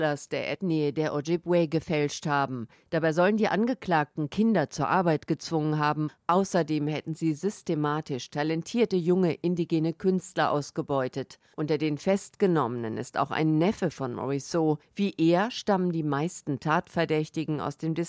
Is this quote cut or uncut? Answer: uncut